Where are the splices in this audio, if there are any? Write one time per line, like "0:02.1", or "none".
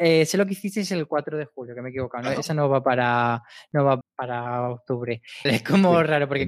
0:04.0
0:05.5